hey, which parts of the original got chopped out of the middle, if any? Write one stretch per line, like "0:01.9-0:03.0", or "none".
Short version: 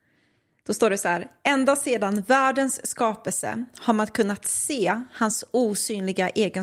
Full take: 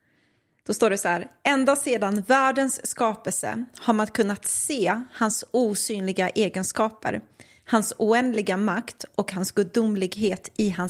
none